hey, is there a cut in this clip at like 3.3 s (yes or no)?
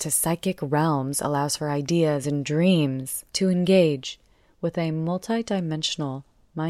yes